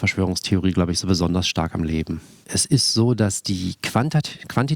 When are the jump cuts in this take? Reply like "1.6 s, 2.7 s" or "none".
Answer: 2.4 s

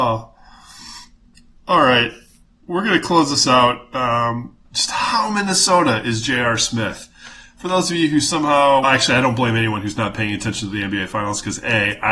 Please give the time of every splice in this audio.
4.7 s, 8.8 s

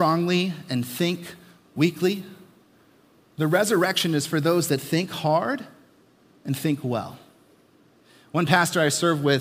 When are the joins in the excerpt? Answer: none

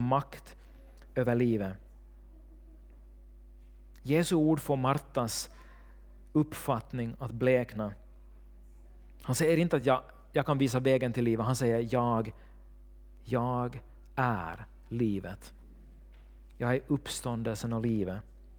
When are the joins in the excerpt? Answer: none

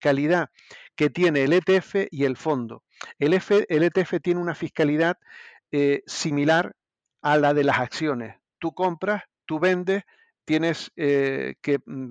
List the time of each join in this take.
none

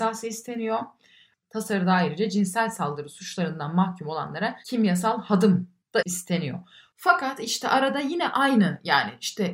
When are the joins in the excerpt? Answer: 4.6 s

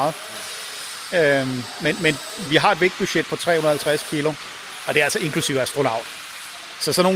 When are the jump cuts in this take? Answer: 2.5 s

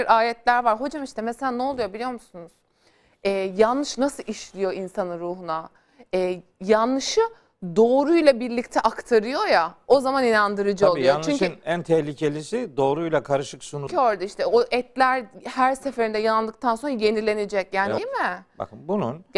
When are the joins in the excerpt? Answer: 13.9 s, 18.0 s

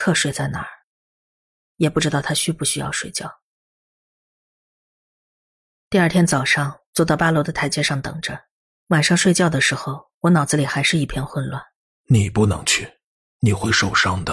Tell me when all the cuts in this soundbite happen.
6.9 s, 8.7 s, 12.0 s

